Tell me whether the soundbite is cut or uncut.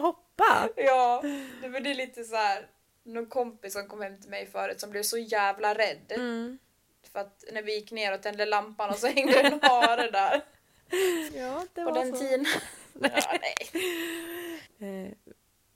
cut